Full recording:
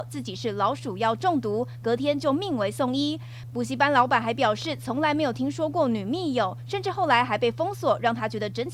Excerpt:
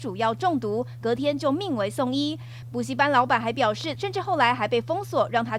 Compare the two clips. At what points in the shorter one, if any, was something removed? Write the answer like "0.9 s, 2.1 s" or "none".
4.0 s